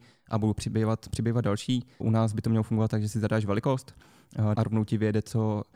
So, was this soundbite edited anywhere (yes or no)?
yes